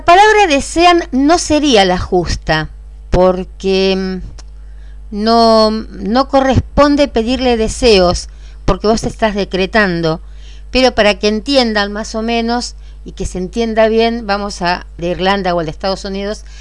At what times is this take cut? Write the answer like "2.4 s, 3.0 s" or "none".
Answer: 15.0 s